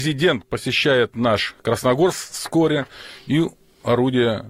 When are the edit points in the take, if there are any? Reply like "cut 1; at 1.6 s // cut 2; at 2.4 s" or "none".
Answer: none